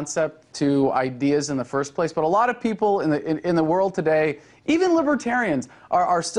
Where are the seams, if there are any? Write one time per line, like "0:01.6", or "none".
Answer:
0:04.5

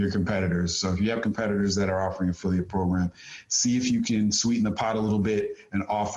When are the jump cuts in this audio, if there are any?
none

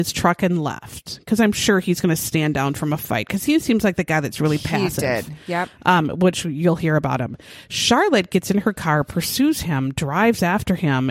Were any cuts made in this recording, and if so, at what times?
none

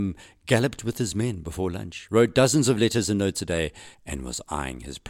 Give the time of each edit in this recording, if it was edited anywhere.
none

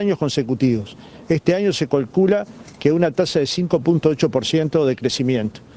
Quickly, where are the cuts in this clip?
none

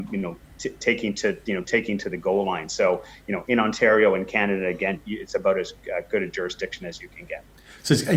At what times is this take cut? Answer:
0:05.0

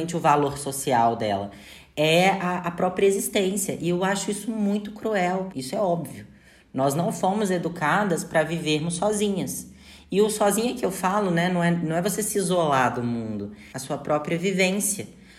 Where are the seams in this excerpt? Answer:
0:05.5
0:13.7

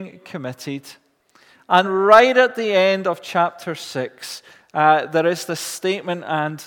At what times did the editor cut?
0:01.8

